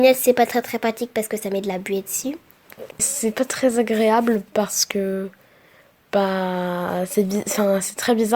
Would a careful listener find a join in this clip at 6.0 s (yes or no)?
no